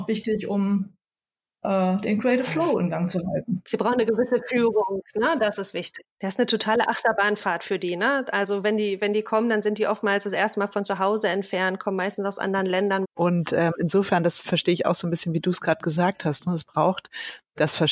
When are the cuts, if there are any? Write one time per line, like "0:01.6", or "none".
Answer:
0:06.0
0:13.0

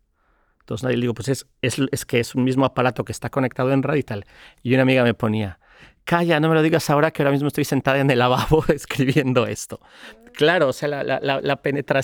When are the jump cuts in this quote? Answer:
none

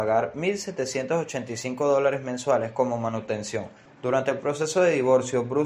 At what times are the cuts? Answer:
0:03.9

